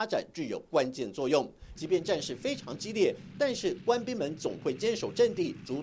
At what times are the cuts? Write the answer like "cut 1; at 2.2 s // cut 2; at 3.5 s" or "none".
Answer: cut 1; at 1.7 s